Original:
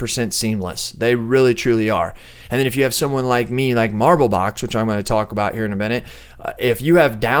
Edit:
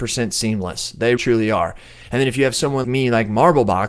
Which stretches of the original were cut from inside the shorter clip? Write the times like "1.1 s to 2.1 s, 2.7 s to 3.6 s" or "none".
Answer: 1.2 s to 1.6 s, 3.2 s to 3.5 s